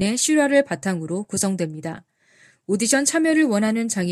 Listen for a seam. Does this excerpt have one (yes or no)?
no